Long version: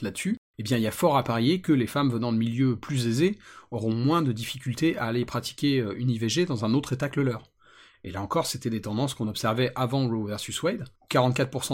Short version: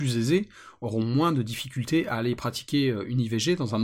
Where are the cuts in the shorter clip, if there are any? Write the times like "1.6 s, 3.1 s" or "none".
none